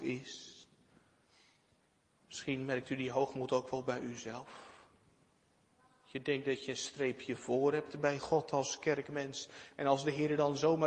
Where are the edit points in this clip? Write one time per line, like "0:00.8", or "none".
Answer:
none